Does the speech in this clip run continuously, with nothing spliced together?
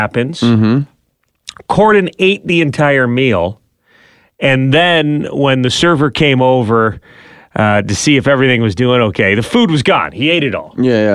yes; 0 cuts

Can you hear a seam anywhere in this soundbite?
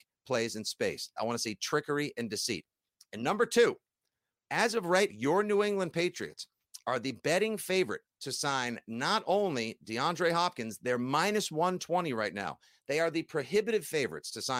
yes; 3 cuts; at 1.2 s, 5.1 s, 8.1 s

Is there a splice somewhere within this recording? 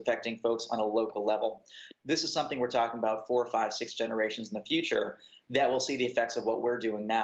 yes; 1 cut; at 1.9 s

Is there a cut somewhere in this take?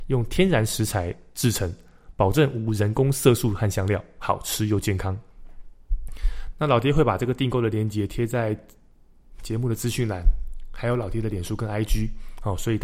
yes; 1 cut; at 6.5 s

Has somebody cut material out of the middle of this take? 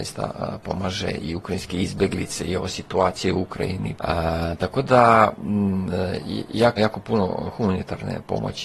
yes; 2 cuts; at 4.0 s, 6.8 s

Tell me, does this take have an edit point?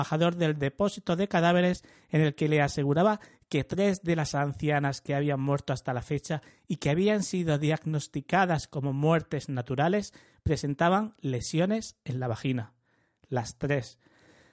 no; 0 cuts

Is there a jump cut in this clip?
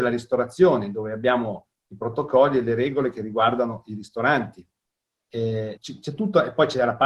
yes; 1 cut; at 5.8 s

